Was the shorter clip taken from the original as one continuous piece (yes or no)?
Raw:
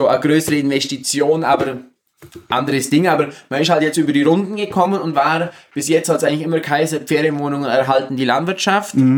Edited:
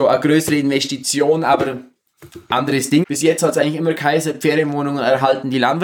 no